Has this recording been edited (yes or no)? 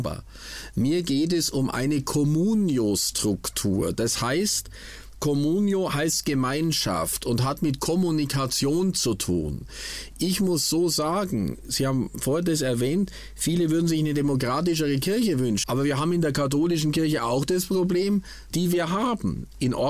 yes